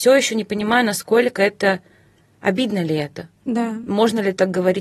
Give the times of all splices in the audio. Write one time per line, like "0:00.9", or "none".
none